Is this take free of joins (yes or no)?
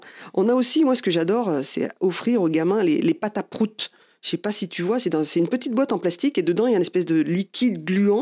yes